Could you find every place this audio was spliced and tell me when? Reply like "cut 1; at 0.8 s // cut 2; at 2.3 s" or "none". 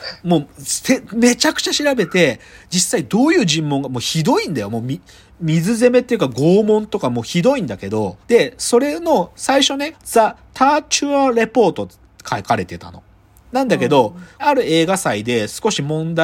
cut 1; at 8.2 s // cut 2; at 9.9 s // cut 3; at 14.4 s